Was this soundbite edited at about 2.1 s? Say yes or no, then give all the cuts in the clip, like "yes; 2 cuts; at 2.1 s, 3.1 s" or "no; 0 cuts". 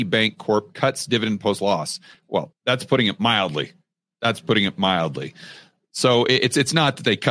no; 0 cuts